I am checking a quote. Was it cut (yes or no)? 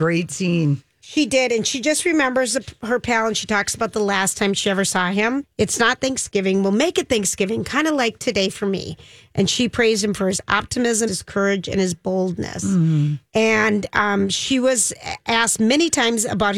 yes